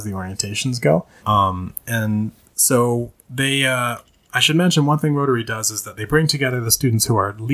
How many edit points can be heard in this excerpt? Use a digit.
1